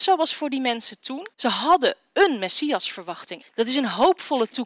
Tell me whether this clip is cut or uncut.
cut